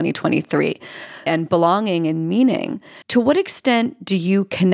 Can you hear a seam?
yes; 2 cuts; at 1.3 s, 3.0 s

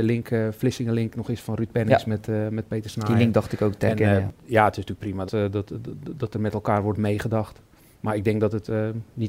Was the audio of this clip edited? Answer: yes; 1 cut; at 5.3 s

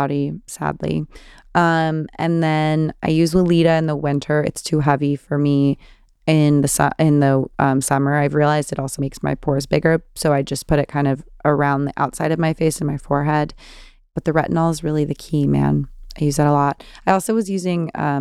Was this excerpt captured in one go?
no; 1 cut; at 9.0 s

